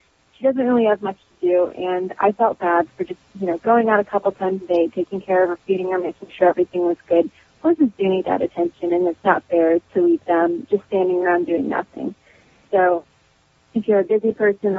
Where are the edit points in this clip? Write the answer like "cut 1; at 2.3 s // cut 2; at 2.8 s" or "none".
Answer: none